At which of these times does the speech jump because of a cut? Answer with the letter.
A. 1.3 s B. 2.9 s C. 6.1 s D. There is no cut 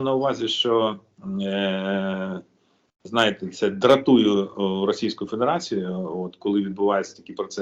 D